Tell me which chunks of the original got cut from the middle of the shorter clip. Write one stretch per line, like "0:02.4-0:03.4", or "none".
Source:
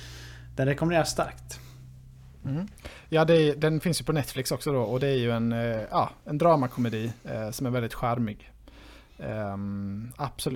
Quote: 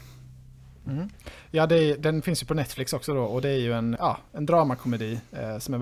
0:05.5-0:05.9